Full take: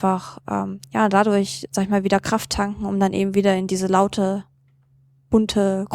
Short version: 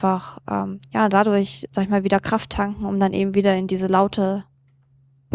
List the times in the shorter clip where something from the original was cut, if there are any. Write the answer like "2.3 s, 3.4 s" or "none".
none